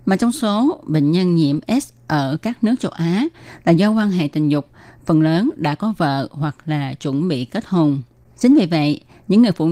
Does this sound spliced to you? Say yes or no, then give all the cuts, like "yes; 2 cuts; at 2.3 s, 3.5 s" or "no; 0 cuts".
no; 0 cuts